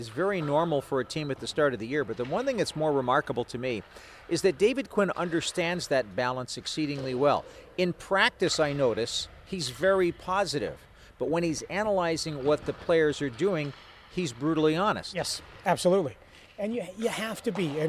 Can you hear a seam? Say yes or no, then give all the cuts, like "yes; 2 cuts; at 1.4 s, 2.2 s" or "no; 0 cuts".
no; 0 cuts